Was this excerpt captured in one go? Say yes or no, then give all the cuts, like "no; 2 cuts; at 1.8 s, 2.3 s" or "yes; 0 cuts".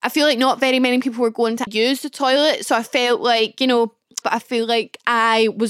no; 2 cuts; at 1.7 s, 4.2 s